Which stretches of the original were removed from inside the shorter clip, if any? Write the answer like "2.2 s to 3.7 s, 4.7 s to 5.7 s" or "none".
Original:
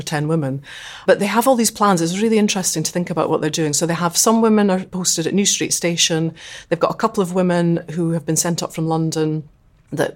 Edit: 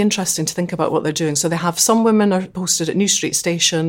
none